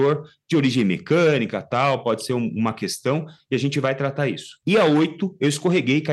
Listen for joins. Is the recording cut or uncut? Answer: cut